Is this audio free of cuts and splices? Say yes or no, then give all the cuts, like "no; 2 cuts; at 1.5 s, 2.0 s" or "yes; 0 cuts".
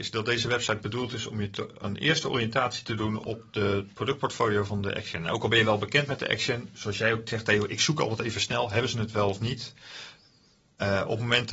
yes; 0 cuts